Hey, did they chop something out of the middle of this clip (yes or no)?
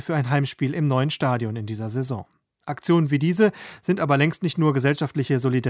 no